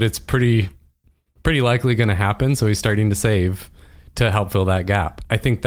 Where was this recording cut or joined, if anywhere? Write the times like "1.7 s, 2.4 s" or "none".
none